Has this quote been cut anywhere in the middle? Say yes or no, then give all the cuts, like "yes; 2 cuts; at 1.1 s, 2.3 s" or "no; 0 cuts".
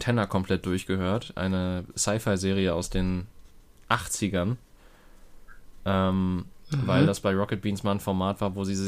no; 0 cuts